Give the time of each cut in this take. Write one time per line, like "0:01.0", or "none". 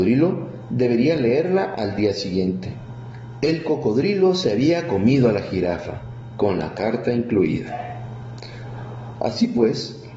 0:03.3
0:09.1